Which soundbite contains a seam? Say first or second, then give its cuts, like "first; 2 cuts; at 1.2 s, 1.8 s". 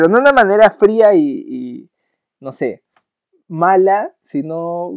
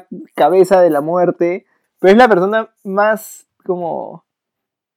second; 1 cut; at 1.8 s